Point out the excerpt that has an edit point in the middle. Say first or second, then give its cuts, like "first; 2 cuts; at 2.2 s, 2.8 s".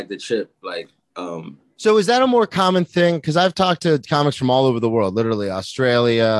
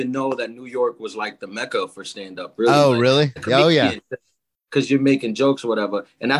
second; 1 cut; at 3.4 s